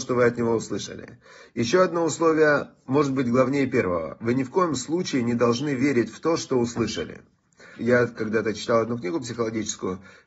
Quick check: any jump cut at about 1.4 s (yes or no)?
no